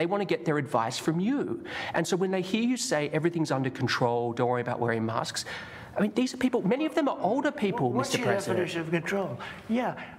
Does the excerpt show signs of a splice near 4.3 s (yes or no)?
no